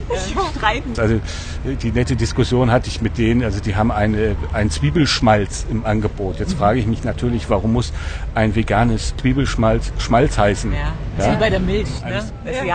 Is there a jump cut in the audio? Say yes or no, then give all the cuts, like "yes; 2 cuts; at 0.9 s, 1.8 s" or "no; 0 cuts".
yes; 1 cut; at 0.9 s